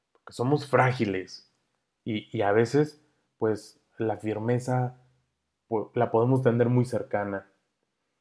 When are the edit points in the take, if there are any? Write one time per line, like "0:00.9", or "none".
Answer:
none